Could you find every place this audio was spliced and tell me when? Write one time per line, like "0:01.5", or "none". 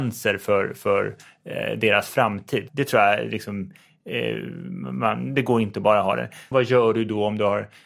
0:02.7
0:06.5